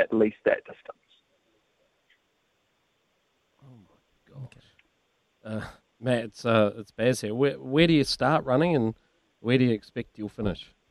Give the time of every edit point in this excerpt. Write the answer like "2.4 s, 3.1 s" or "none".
none